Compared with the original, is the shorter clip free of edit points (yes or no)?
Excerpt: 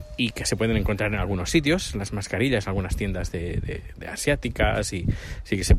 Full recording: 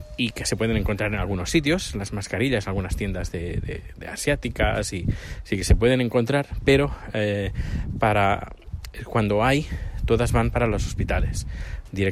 yes